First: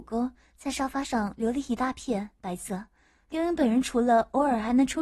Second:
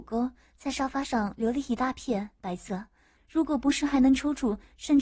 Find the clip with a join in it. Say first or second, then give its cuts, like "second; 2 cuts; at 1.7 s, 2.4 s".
second; 1 cut; at 3.2 s